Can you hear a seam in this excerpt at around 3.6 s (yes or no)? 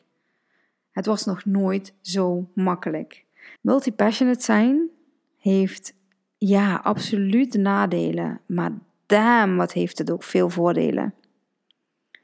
yes